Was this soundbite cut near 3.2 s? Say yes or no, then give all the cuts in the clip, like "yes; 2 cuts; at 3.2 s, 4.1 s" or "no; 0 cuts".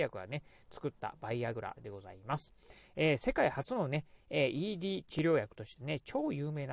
no; 0 cuts